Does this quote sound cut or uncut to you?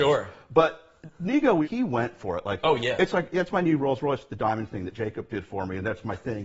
uncut